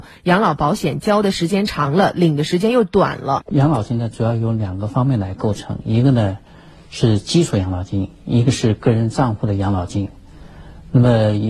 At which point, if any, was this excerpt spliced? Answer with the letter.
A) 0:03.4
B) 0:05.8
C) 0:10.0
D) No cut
A